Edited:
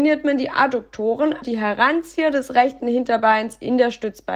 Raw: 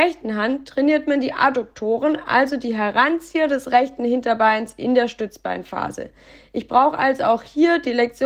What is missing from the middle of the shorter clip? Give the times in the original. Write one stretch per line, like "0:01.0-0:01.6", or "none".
0:02.2-0:02.6